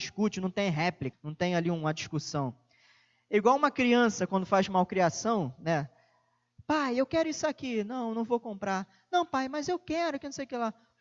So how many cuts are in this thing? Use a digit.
1